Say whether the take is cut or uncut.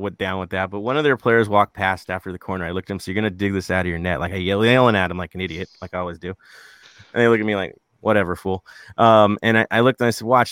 uncut